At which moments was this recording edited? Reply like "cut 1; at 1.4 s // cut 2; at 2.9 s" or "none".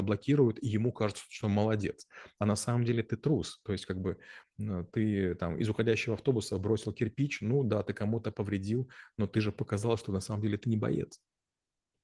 none